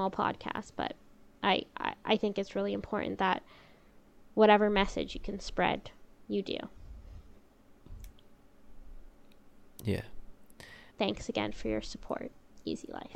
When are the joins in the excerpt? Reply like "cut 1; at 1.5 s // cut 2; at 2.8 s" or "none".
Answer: cut 1; at 10.9 s